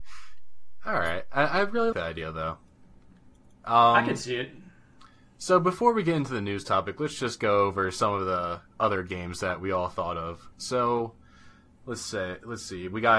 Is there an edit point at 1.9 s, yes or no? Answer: yes